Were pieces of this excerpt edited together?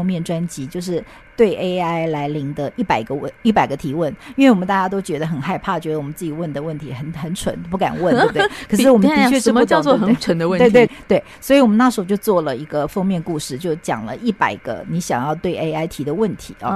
yes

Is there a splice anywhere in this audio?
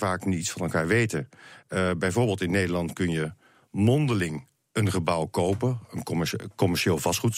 no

